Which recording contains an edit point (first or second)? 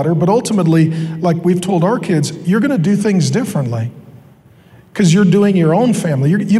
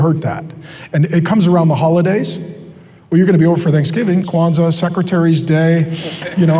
second